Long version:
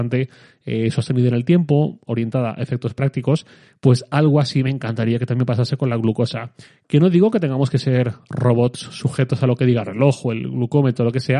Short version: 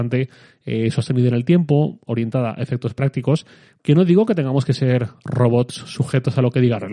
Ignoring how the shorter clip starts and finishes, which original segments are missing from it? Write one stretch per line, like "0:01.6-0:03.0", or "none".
0:03.8-0:06.8